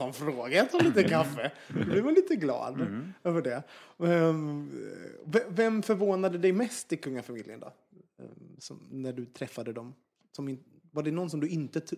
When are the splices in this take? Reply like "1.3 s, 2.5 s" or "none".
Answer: none